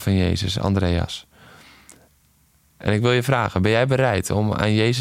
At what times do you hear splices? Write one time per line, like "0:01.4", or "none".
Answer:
none